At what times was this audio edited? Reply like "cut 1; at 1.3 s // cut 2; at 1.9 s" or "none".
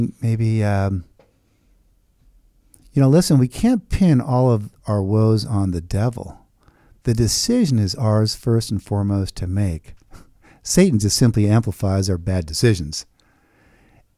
none